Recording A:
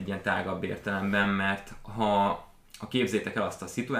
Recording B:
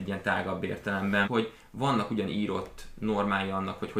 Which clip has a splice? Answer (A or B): B